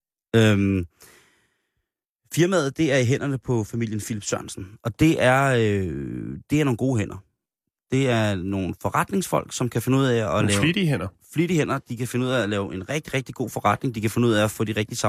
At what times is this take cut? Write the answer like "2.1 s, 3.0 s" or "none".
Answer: none